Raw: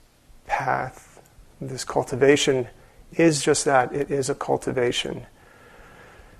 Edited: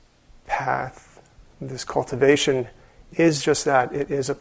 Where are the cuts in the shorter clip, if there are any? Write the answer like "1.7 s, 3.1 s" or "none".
none